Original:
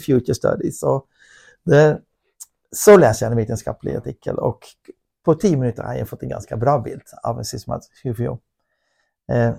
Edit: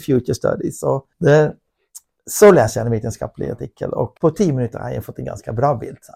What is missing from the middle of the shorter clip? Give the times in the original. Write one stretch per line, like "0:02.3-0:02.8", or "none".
0:01.1-0:01.6
0:04.6-0:05.2

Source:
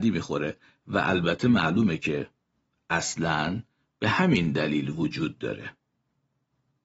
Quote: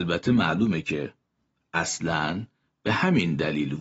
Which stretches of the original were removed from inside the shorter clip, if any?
none

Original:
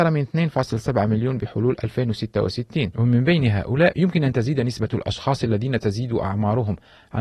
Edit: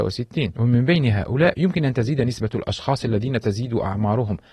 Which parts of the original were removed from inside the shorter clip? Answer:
none

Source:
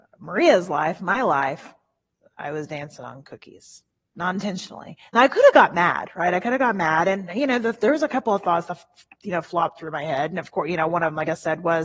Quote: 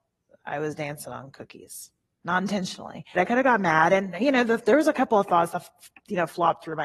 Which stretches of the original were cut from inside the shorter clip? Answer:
0:05.1-0:06.3

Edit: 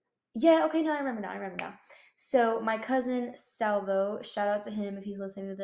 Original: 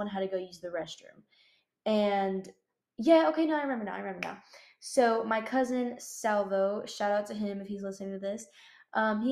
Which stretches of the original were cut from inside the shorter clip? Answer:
none

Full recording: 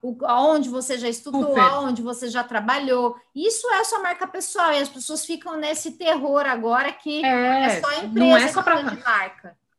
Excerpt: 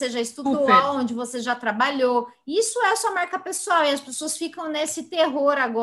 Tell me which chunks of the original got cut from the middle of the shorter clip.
none

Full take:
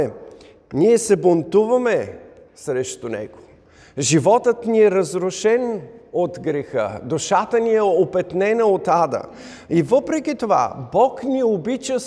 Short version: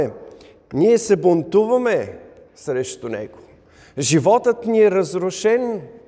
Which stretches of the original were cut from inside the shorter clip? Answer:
none

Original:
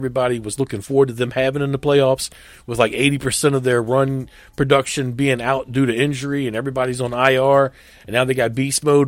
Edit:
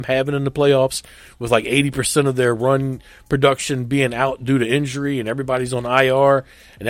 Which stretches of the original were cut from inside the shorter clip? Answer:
none

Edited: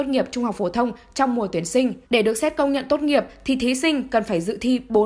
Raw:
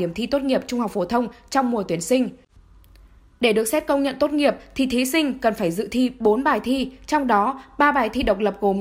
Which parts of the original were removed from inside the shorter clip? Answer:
0:02.4-0:03.3

